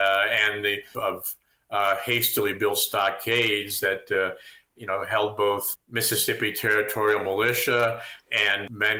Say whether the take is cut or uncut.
cut